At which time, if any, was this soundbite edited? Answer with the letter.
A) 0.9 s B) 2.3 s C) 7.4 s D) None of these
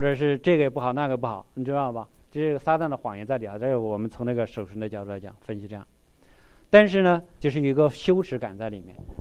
C